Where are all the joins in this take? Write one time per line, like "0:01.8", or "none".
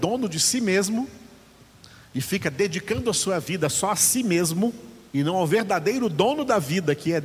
0:05.1